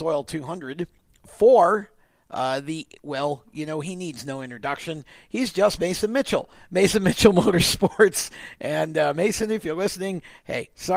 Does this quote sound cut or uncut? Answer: uncut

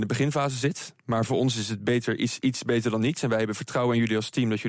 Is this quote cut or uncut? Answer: uncut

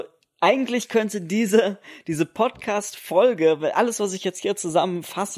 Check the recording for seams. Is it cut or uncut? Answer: uncut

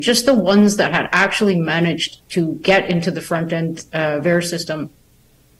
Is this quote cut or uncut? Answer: uncut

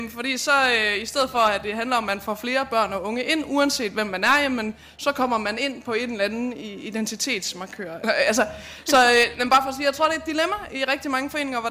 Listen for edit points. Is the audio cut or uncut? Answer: cut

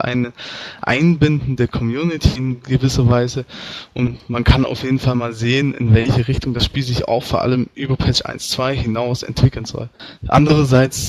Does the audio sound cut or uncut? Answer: cut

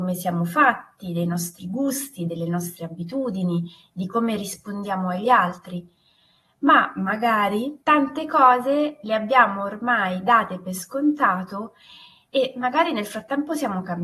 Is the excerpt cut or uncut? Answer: cut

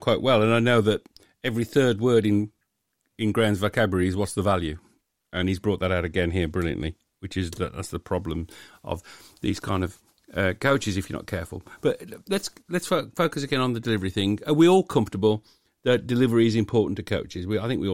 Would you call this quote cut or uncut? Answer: uncut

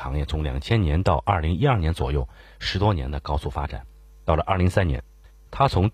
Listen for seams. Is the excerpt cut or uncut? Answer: uncut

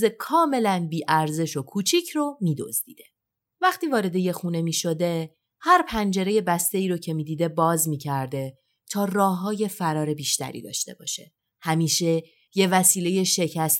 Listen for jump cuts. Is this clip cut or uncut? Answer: uncut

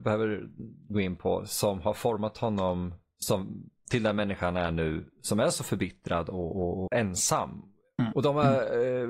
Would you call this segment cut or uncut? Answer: cut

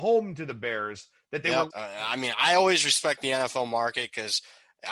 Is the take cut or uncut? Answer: cut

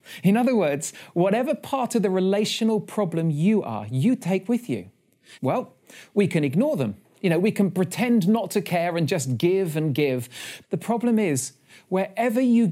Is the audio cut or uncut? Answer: cut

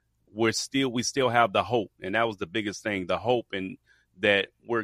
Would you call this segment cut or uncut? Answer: uncut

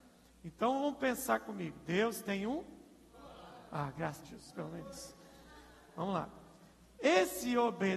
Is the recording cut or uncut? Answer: cut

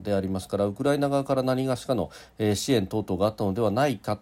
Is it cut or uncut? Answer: uncut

